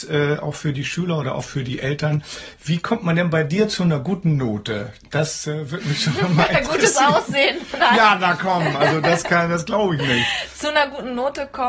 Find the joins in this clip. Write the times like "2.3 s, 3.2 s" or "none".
none